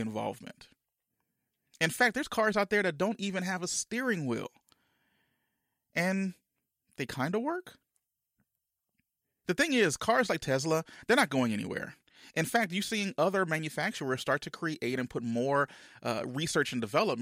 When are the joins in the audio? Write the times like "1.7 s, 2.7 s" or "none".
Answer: 9.4 s